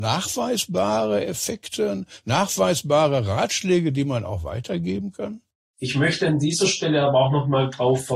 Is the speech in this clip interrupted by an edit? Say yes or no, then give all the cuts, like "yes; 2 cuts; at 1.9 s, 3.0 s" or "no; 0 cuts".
yes; 1 cut; at 5.6 s